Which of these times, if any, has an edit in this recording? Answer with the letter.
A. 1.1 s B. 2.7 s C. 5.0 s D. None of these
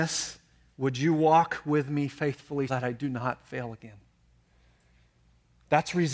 B